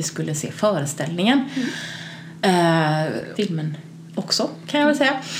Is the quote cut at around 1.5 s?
no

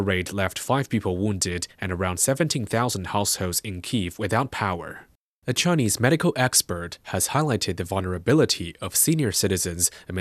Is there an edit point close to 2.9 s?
no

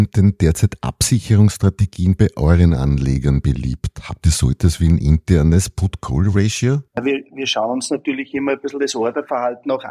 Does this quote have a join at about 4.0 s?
no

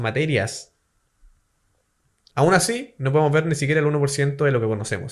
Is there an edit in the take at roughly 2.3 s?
yes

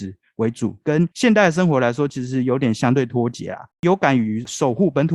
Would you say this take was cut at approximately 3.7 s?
yes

